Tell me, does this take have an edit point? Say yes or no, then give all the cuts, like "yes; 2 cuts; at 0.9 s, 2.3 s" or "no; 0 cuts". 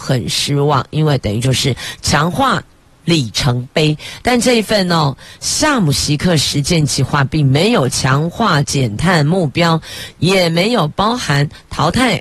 yes; 1 cut; at 2.9 s